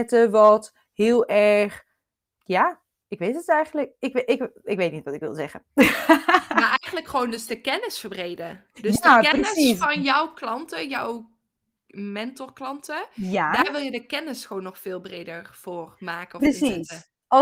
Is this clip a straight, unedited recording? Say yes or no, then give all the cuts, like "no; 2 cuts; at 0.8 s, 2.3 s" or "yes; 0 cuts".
no; 1 cut; at 2.3 s